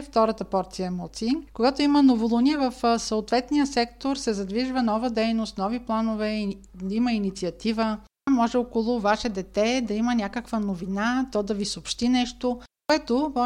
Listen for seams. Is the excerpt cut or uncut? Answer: cut